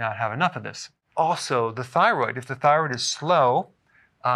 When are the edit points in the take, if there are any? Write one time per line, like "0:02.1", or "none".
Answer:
none